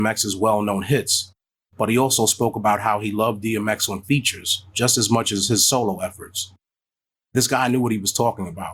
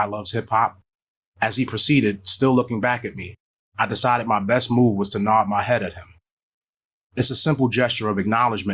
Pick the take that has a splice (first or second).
second